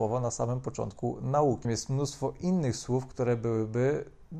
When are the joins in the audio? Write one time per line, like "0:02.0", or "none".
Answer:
0:01.6